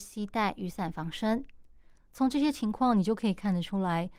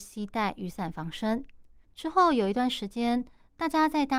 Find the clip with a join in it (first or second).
second